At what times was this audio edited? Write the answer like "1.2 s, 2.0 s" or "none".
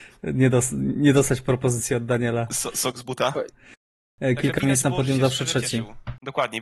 3.5 s